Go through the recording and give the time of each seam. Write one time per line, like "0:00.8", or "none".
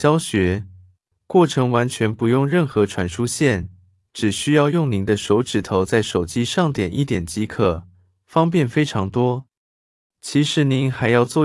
0:01.1
0:10.0